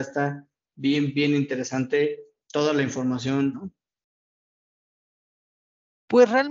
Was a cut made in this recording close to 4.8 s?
no; 1 cut; at 3.5 s

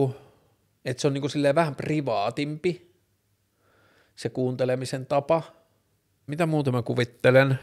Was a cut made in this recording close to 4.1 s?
no; 1 cut; at 6.3 s

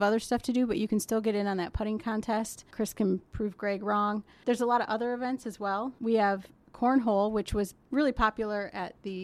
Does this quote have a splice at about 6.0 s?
no; 0 cuts

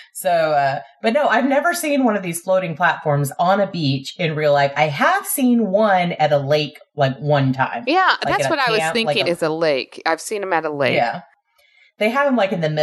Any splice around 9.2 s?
yes; 1 cut; at 9.2 s

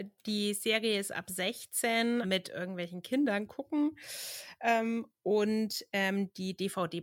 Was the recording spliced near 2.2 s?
yes; 1 cut; at 2.2 s

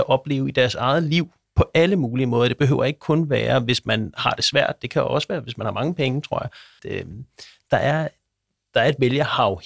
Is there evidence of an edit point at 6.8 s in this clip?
yes; 1 cut; at 6.8 s

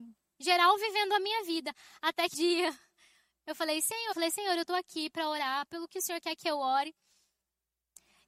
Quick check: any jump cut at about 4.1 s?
yes; 2 cuts; at 2.3 s, 4.1 s

